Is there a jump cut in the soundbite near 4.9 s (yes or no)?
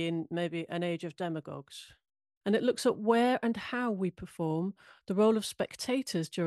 no